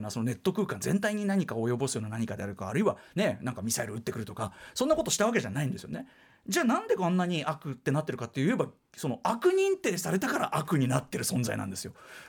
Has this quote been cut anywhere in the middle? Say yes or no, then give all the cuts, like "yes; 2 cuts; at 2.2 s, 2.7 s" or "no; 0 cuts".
no; 0 cuts